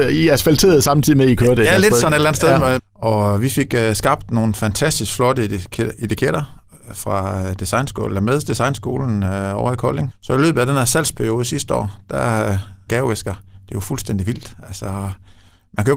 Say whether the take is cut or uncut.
cut